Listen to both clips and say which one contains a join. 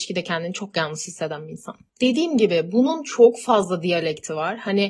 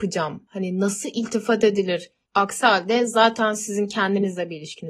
second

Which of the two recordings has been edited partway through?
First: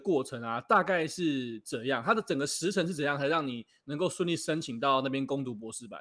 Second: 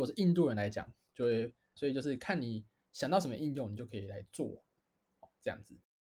second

